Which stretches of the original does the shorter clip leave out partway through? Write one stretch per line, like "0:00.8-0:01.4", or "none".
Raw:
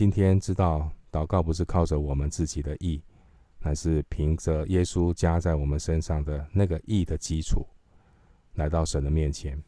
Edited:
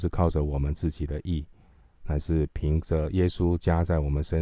none